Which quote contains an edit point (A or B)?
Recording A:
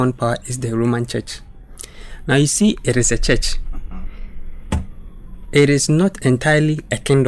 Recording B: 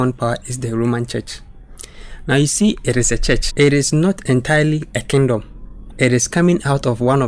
B